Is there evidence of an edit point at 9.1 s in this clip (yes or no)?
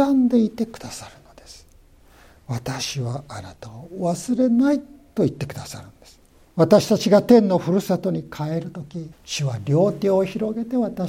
yes